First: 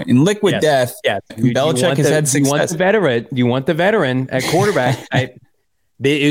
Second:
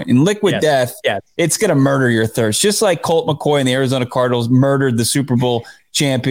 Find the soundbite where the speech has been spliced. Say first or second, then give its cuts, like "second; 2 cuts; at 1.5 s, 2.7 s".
first; 1 cut; at 1.3 s